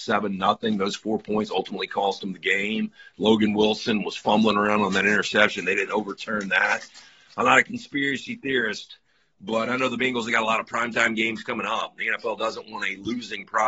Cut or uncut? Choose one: uncut